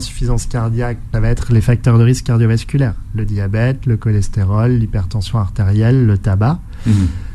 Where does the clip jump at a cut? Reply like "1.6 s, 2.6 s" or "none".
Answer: 1.1 s